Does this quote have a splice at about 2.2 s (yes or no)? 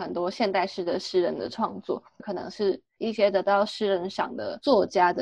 yes